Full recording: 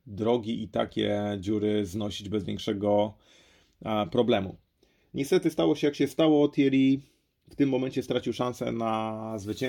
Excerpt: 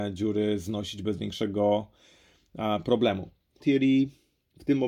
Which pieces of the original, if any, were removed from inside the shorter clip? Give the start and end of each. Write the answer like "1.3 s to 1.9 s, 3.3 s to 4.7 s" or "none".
4.9 s to 6.5 s